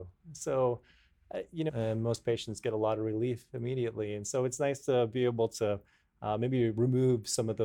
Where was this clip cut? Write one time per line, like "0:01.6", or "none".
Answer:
0:01.7